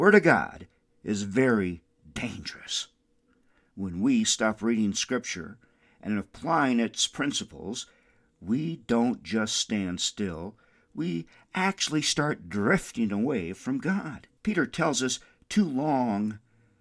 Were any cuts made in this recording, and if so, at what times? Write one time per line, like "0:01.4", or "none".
0:14.4